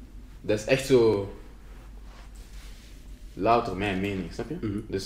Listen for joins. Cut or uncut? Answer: uncut